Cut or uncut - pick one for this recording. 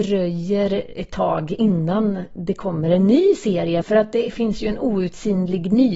cut